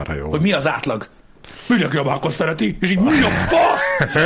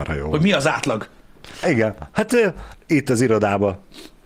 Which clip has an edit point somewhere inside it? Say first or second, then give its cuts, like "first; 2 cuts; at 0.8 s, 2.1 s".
second; 1 cut; at 1.6 s